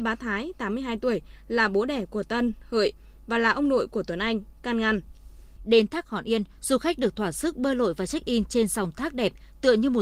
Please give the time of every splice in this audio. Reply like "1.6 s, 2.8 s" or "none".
5.6 s